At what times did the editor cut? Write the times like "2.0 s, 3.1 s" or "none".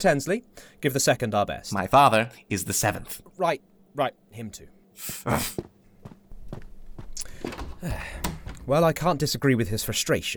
none